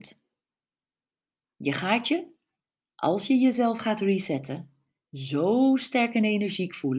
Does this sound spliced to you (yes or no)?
no